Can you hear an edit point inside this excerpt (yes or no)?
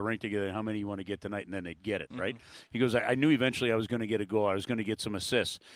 no